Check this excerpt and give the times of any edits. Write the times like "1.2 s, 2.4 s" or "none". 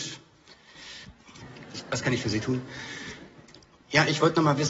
1.4 s